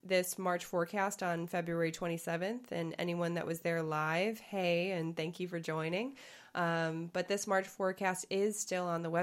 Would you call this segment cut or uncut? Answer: uncut